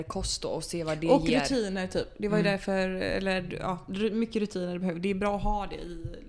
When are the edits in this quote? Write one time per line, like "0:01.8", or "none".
none